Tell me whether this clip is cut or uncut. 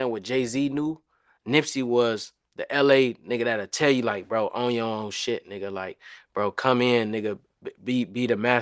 uncut